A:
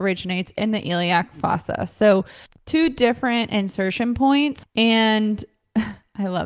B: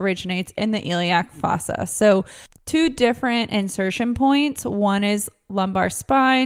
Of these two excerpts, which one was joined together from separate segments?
A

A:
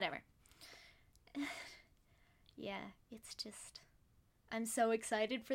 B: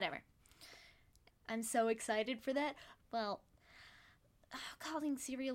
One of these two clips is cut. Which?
B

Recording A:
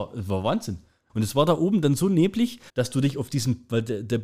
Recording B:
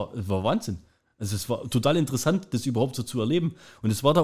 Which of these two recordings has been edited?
A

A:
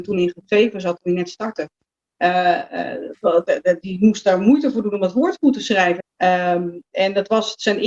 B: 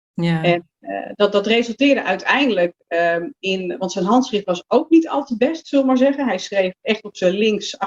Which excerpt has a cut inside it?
A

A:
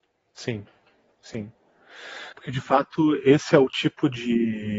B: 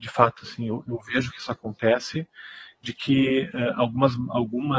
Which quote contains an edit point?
A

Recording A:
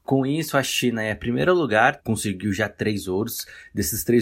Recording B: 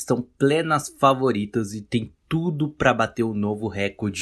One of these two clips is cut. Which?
A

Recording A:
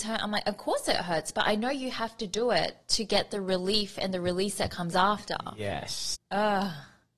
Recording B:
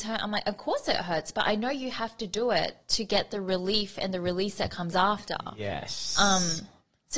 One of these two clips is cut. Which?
A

